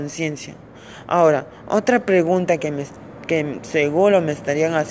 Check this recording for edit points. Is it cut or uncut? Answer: uncut